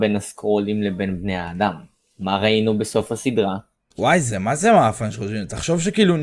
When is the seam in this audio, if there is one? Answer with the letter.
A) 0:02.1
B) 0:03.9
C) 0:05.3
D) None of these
B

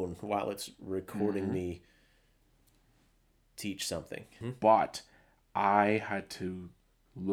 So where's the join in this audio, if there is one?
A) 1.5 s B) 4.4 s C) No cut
B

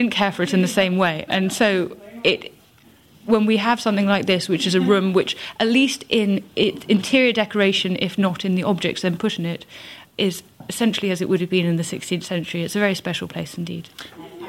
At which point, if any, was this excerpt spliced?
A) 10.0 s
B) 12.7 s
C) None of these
A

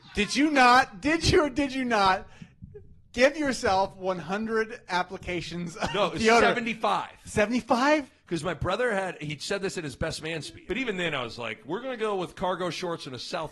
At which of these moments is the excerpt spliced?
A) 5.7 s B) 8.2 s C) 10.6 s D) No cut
C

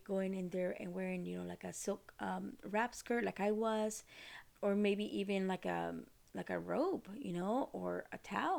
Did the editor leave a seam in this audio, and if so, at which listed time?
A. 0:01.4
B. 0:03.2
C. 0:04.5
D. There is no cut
C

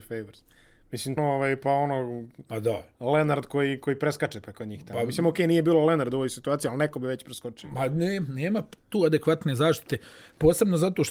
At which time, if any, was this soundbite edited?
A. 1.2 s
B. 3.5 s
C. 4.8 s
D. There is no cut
A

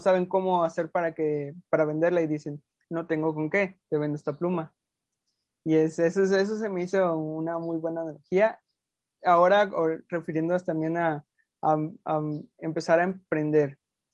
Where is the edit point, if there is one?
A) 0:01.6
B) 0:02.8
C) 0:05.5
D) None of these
B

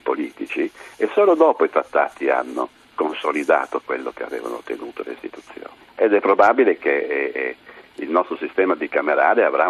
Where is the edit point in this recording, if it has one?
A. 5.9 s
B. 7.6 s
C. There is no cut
A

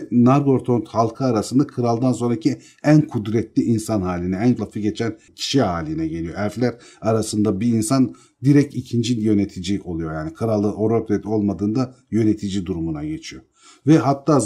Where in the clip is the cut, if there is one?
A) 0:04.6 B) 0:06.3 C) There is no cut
A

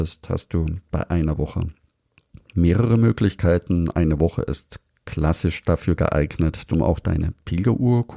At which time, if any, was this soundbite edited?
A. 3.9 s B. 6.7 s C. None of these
B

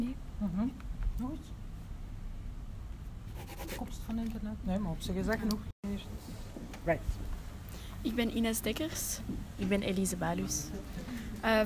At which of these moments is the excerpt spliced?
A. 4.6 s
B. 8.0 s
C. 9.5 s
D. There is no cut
A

